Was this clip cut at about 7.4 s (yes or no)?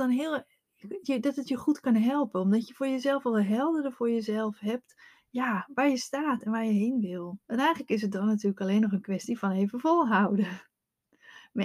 yes